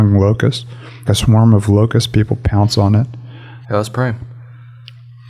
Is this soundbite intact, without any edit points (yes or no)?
no